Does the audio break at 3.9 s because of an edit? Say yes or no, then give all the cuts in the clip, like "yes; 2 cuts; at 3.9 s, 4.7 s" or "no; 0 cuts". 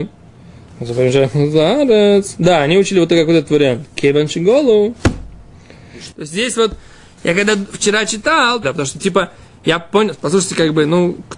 no; 3 cuts; at 6.1 s, 8.6 s, 10.2 s